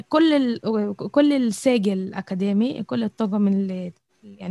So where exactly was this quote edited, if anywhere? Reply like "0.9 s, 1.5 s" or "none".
none